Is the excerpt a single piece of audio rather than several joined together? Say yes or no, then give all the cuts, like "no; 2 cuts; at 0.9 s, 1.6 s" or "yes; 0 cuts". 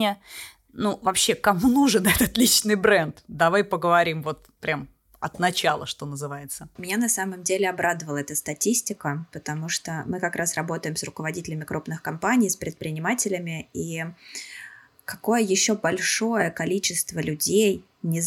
yes; 0 cuts